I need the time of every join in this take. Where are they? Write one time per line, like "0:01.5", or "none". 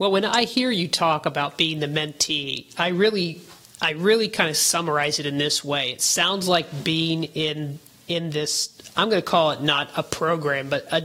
none

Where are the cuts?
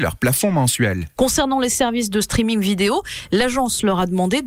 0:01.2

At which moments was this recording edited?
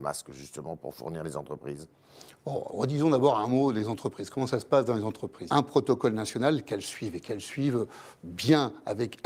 0:02.7
0:05.5

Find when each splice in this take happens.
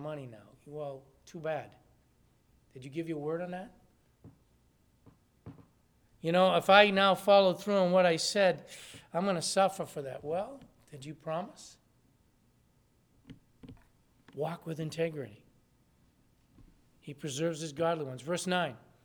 none

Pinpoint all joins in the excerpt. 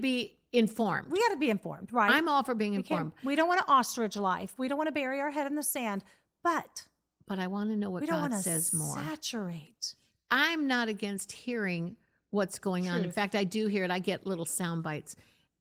none

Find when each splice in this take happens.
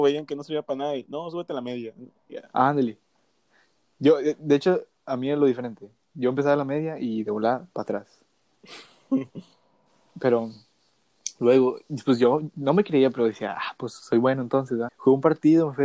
0:14.9

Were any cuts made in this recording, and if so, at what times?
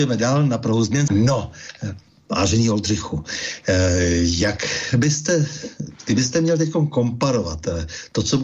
0:01.1

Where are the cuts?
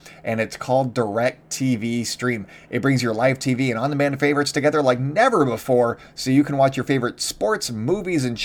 none

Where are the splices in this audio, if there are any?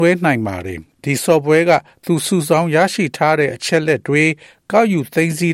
0:00.9

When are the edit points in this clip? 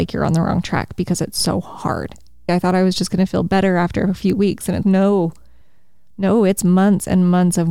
0:02.5
0:04.8

